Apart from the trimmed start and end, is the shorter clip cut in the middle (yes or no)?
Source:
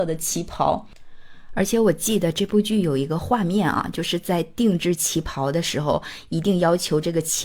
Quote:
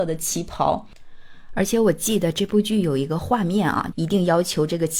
yes